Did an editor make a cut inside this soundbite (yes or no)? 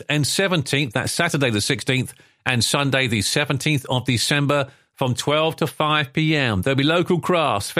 no